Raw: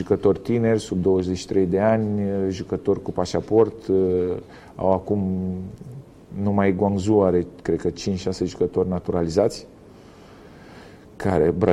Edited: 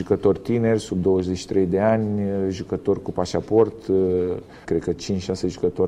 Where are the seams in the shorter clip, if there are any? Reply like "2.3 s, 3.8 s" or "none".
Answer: 4.6 s